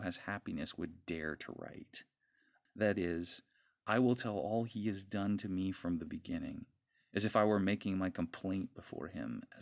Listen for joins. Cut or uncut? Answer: cut